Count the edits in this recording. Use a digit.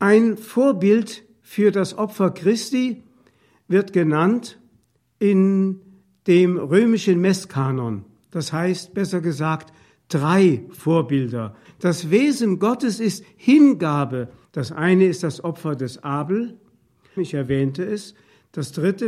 3